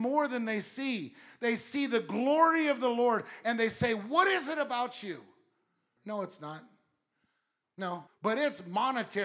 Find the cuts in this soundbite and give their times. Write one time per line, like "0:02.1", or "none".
0:06.0
0:08.1

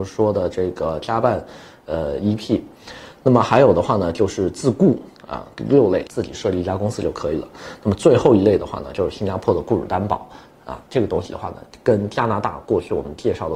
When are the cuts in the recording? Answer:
0:06.1
0:10.9

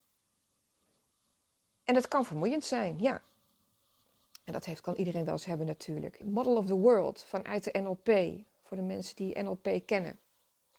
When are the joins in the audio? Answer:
0:06.2

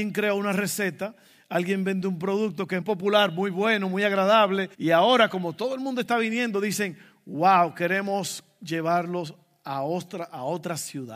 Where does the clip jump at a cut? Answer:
0:02.8
0:04.7

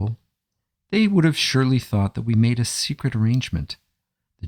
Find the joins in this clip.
none

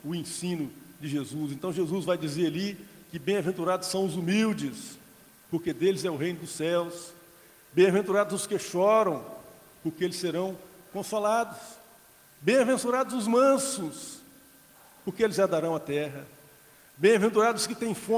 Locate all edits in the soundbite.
none

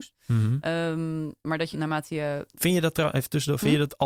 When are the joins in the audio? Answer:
0:01.7

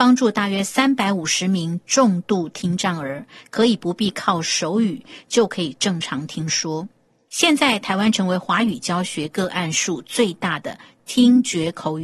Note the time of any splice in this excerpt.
none

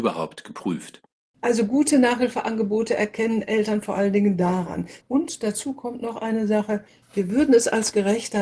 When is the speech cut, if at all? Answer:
0:05.0
0:07.0

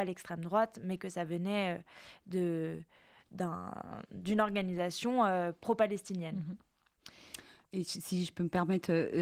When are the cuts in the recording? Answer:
none

